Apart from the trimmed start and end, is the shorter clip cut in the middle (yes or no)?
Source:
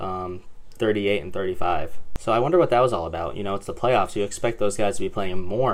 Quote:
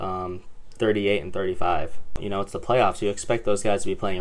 yes